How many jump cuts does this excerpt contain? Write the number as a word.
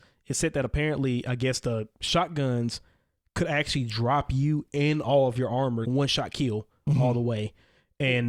one